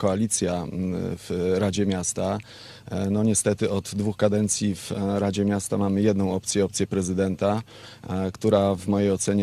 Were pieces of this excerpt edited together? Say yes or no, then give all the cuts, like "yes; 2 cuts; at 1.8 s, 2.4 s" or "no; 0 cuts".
no; 0 cuts